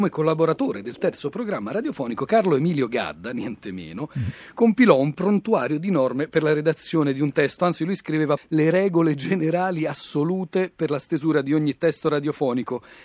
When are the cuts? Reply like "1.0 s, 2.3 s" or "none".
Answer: 8.4 s